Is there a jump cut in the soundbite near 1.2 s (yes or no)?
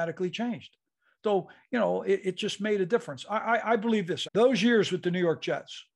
no